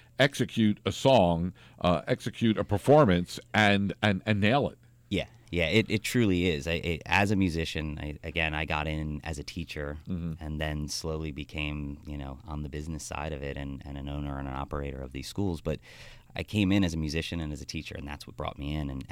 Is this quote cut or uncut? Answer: uncut